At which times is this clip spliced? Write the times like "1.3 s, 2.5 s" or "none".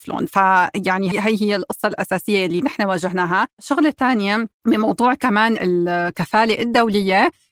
1.1 s, 3.5 s

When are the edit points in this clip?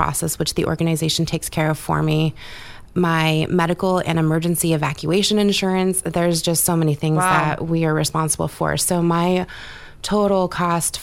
2.9 s

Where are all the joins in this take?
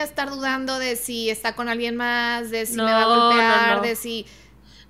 none

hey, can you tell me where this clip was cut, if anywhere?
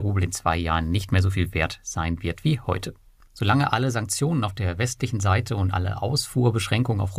3.3 s

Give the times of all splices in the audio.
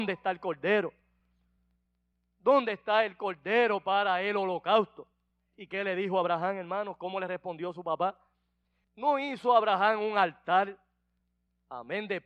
8.8 s

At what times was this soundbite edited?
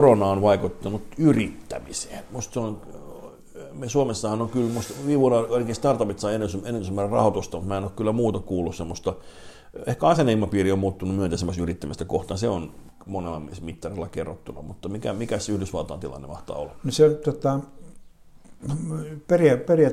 none

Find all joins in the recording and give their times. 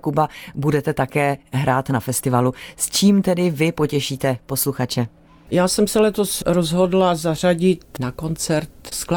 none

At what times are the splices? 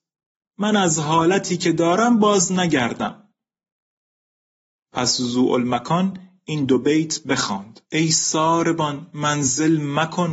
7.8 s

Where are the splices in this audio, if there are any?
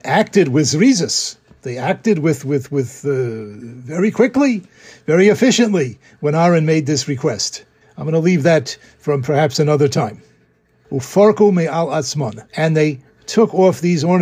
7.8 s, 10.8 s, 12.5 s

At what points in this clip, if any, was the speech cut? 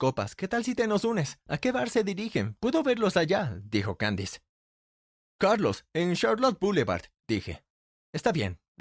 1.5 s

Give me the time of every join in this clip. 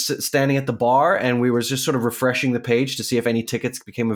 none

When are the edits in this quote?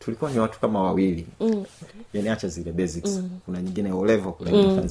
1.8 s

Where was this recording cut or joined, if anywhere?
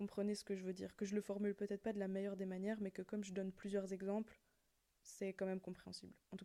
none

